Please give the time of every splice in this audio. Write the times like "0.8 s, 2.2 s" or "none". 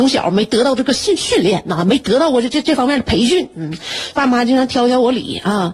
3.0 s, 4.1 s